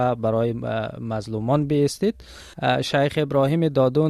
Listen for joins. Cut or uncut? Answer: uncut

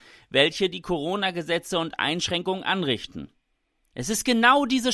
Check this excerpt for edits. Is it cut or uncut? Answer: uncut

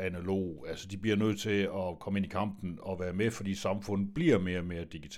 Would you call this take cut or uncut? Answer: uncut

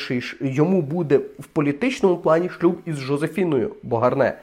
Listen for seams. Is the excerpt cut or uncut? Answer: uncut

